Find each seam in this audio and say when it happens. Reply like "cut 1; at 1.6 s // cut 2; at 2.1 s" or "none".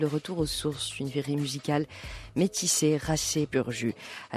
cut 1; at 3.5 s